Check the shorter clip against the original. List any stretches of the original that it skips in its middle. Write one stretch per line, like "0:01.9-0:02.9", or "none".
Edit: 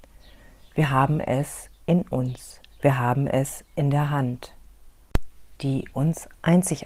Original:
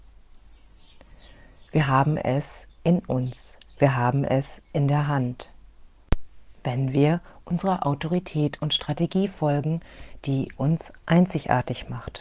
0:06.5-0:10.2